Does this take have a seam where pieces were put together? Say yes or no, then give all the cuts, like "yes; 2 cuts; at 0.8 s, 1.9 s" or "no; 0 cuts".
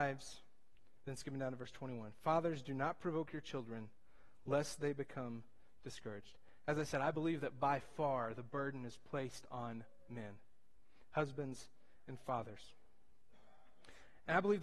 yes; 1 cut; at 1.0 s